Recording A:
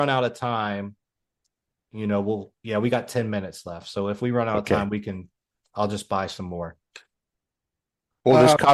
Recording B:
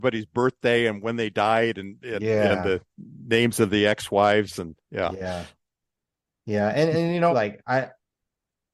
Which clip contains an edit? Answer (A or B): B